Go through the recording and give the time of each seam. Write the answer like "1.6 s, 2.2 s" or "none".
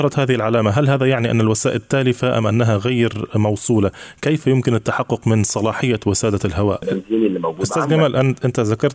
6.8 s